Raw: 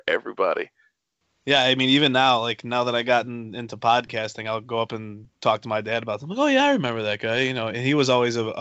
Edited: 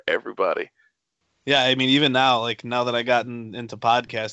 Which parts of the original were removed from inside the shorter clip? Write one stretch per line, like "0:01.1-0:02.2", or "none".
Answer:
none